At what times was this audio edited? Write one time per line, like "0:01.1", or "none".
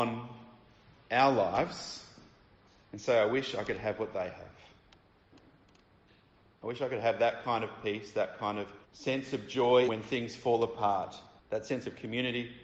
0:08.8
0:09.9